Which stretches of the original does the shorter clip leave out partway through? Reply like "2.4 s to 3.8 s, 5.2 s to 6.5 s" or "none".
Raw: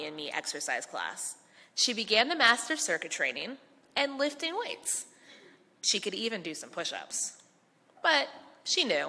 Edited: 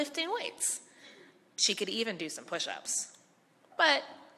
none